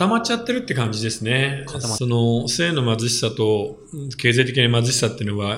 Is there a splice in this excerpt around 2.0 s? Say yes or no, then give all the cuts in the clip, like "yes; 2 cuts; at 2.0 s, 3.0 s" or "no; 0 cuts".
yes; 1 cut; at 2.0 s